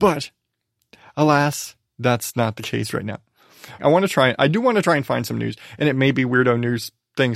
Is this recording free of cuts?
no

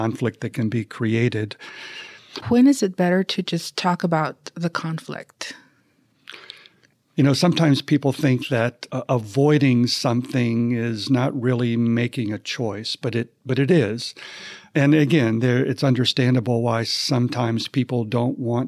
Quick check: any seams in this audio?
yes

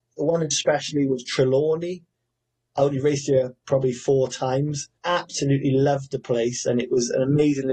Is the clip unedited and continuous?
no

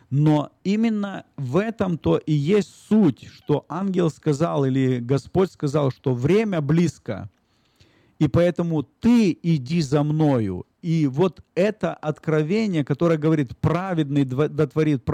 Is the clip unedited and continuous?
yes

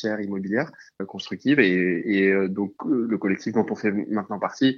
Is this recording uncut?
yes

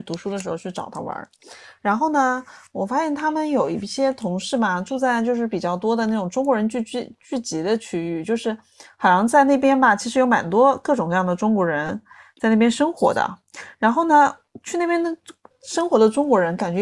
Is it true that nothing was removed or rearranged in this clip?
yes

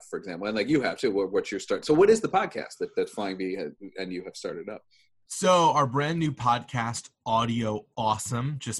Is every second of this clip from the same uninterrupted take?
yes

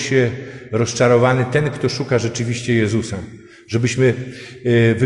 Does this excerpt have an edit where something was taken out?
no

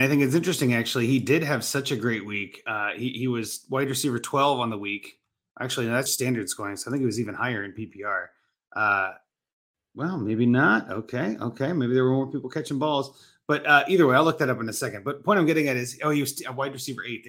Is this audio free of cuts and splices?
no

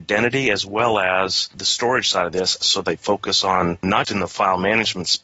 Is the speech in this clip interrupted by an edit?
yes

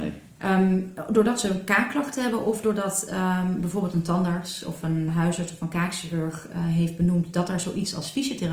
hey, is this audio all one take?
no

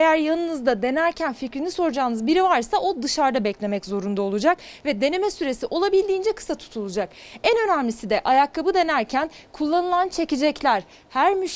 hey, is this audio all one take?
yes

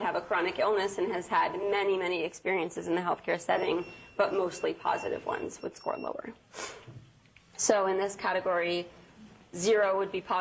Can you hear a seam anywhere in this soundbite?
no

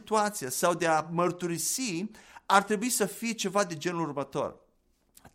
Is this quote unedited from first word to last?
yes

